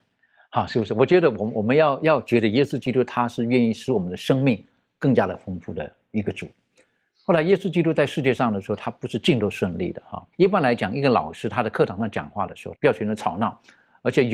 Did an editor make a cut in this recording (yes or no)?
yes